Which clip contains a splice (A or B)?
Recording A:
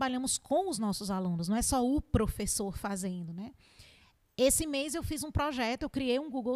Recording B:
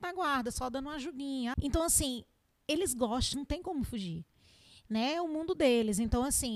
B